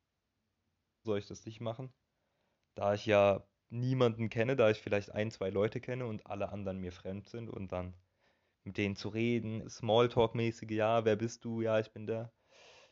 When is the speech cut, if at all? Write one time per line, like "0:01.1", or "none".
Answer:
0:01.0
0:09.6